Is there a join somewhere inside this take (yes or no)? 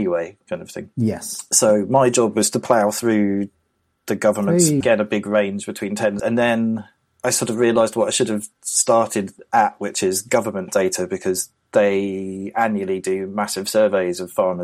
yes